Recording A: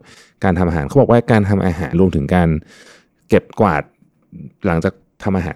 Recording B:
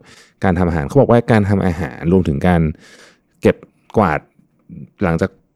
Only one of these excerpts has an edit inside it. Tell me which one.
A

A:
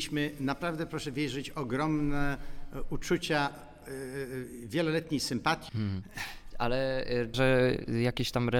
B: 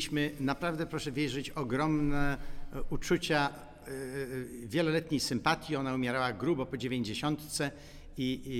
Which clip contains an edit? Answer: A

